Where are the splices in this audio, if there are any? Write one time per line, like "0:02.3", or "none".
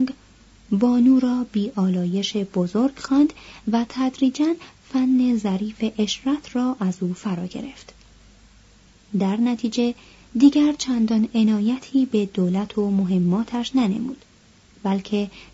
none